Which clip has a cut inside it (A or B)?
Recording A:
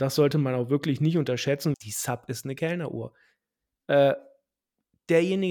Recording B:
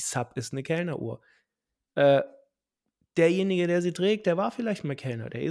A